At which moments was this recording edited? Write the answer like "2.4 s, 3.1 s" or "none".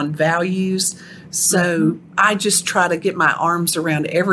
none